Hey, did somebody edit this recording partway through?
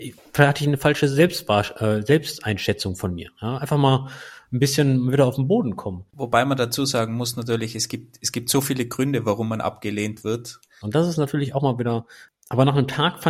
yes; 3 cuts; at 6.1 s, 10.8 s, 12.3 s

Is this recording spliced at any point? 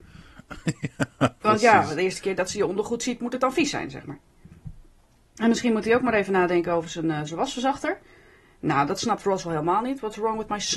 no; 0 cuts

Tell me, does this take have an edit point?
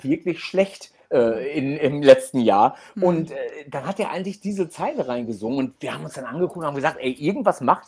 no; 0 cuts

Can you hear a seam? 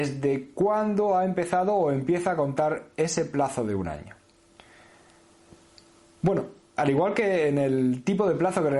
yes; 1 cut; at 6.7 s

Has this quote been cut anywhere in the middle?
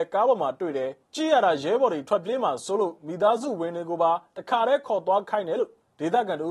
yes; 1 cut; at 1.0 s

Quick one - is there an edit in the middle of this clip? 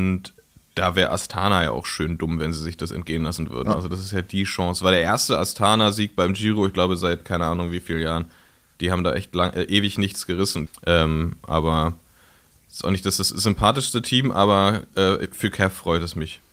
yes; 1 cut; at 10.7 s

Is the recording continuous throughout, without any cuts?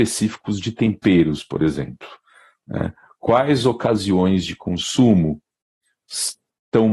yes; 0 cuts

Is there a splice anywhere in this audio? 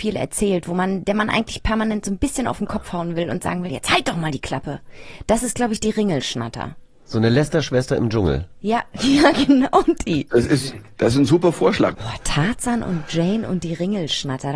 yes; 1 cut; at 11.9 s

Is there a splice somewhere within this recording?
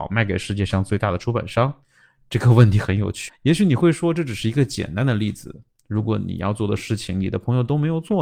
yes; 1 cut; at 3.3 s

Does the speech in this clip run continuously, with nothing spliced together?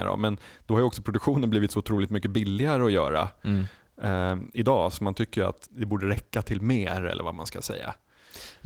no; 1 cut; at 5.7 s

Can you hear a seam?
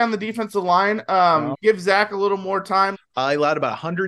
yes; 2 cuts; at 1.5 s, 2.9 s

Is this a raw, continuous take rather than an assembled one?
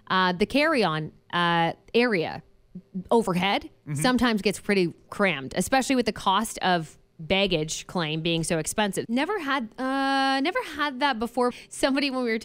no; 2 cuts; at 9.0 s, 11.5 s

